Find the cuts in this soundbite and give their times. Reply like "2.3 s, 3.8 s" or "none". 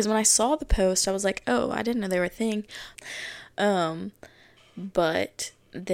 2.9 s